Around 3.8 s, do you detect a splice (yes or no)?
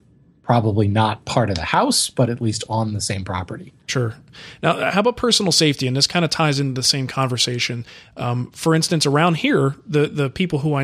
no